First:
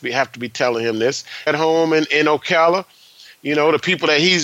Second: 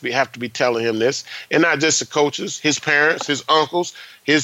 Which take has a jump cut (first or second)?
first